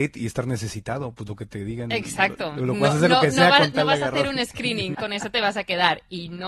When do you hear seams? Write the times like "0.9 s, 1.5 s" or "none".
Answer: 4.9 s

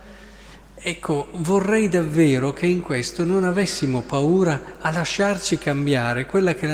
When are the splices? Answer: none

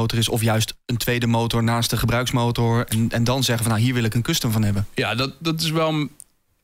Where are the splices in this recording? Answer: none

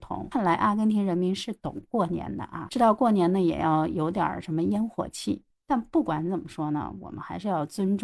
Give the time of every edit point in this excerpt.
5.5 s

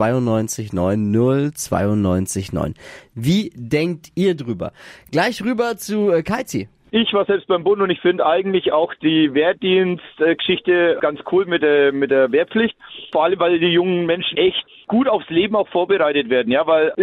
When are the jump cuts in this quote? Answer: 14.3 s

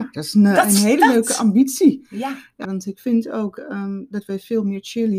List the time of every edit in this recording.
2.6 s

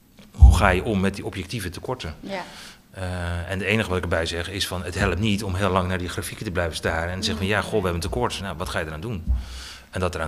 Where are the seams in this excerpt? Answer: 8.4 s

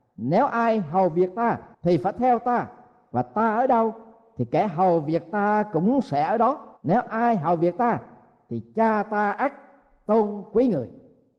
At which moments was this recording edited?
1.7 s, 6.8 s

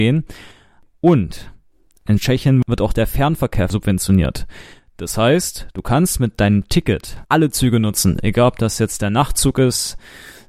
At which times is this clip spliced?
7.2 s

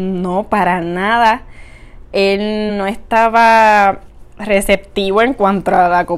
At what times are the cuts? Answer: 2.7 s

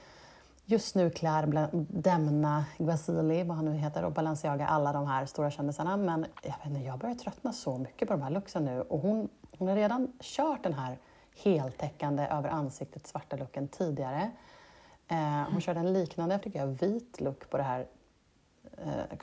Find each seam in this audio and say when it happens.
16.4 s

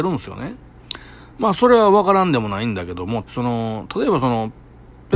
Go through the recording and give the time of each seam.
1.3 s, 3.2 s

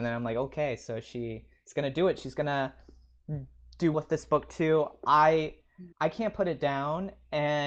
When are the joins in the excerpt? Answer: 3.9 s, 5.9 s

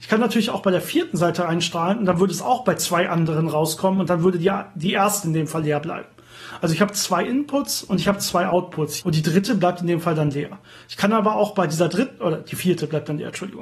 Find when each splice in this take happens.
9.0 s

